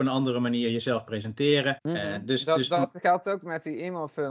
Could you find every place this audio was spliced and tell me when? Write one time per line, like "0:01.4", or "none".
0:01.8